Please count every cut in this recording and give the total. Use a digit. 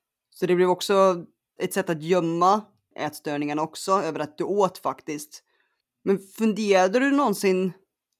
2